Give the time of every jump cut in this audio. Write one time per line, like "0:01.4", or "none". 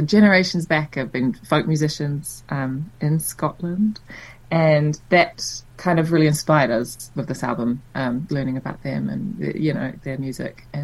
0:05.7
0:08.3